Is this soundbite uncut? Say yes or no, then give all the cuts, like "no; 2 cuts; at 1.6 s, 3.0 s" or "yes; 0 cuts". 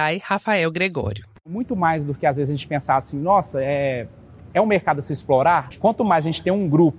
no; 1 cut; at 5.7 s